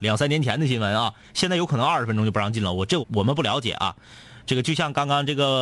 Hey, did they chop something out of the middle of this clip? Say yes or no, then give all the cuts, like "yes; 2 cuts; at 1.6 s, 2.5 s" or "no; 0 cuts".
yes; 1 cut; at 3.0 s